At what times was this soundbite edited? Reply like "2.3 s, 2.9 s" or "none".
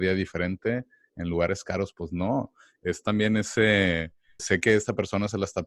4.4 s